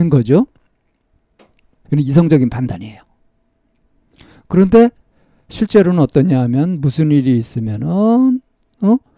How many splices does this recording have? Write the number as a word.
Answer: one